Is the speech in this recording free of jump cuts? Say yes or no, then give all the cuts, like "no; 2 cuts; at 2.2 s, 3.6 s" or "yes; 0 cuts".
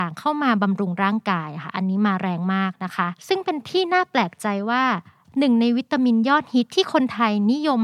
no; 1 cut; at 3.2 s